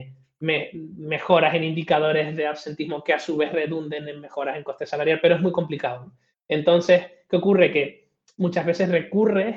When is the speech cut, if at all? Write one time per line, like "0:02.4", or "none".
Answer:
none